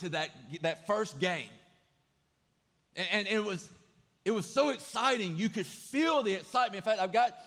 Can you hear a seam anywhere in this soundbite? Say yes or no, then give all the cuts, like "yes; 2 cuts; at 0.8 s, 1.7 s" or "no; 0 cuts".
no; 0 cuts